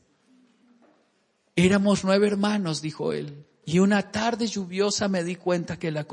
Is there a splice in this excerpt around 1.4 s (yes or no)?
no